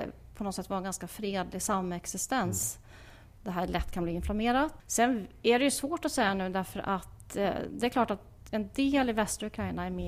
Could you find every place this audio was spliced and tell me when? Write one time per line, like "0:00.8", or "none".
0:03.4
0:04.8

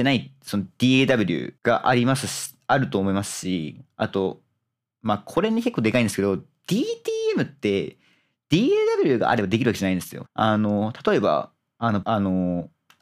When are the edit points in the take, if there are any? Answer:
0:01.6
0:10.3
0:12.0

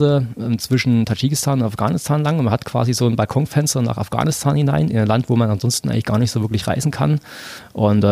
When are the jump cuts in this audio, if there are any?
none

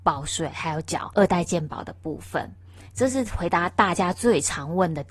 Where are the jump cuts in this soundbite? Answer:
none

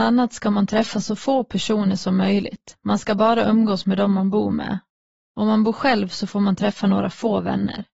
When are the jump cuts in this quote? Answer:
none

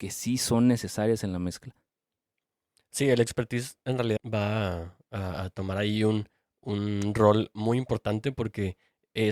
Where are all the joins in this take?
0:04.2

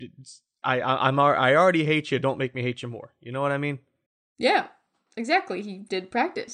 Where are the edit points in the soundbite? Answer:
none

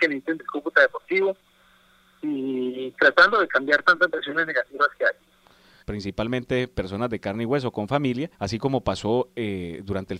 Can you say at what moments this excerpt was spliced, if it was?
0:05.8
0:08.3

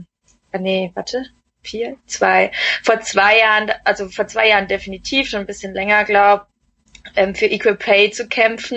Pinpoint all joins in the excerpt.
none

